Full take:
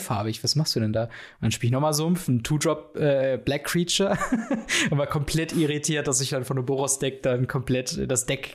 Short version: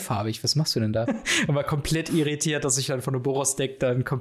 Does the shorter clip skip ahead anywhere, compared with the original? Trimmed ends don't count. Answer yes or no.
yes